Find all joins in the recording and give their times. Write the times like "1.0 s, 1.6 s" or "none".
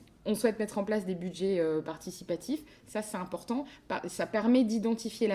none